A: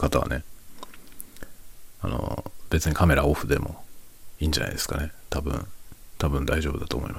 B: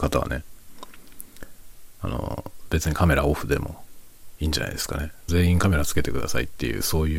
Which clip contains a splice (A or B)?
B